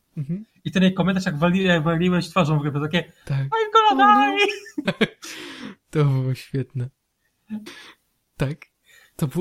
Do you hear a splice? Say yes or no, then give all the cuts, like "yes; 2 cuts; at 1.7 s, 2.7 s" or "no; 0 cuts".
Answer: yes; 2 cuts; at 4.8 s, 7.7 s